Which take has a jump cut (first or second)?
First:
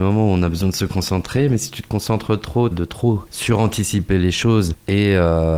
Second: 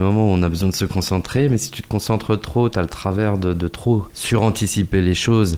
first